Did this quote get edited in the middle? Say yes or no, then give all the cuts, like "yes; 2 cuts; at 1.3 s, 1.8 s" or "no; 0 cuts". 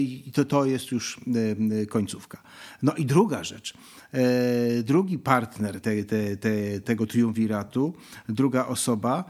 yes; 1 cut; at 5.8 s